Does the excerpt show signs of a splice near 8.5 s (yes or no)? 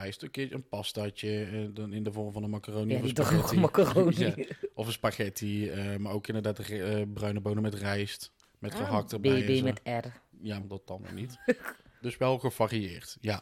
no